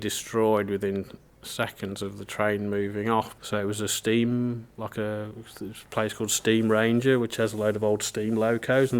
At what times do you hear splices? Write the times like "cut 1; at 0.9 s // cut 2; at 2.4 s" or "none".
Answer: cut 1; at 3.4 s